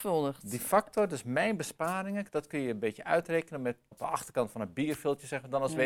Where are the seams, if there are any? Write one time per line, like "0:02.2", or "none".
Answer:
0:03.9